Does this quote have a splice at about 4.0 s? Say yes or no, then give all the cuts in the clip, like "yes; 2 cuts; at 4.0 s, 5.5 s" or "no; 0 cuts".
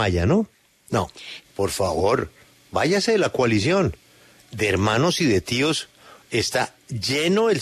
no; 1 cut; at 1.4 s